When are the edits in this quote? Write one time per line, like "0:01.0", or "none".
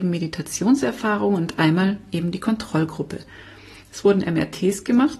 none